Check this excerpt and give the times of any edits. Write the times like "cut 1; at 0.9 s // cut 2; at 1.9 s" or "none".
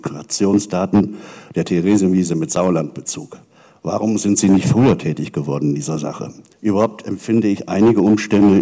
cut 1; at 6.5 s